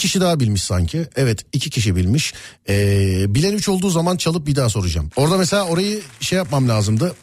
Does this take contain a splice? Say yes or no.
yes